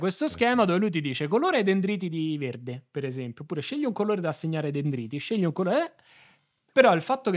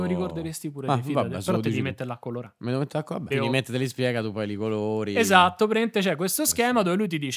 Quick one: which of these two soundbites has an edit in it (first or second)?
second